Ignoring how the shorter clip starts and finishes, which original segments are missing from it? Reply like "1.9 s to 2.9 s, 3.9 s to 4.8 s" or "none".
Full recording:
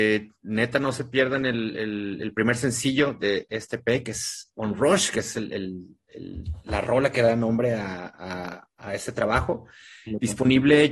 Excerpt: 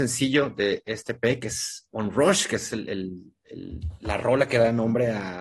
none